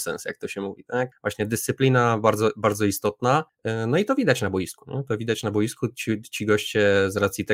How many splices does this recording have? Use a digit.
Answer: 0